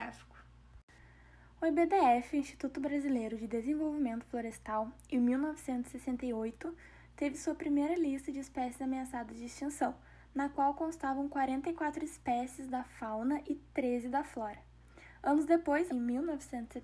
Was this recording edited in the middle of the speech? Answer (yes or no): yes